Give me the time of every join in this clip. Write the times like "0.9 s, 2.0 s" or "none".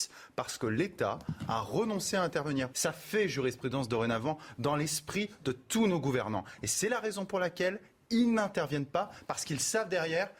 2.7 s